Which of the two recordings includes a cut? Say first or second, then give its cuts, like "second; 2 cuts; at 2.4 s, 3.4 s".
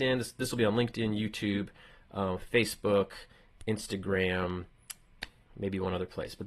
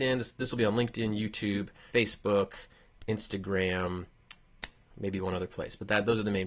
second; 1 cut; at 1.9 s